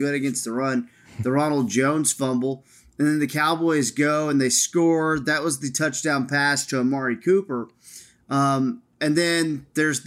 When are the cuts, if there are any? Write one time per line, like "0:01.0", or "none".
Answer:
none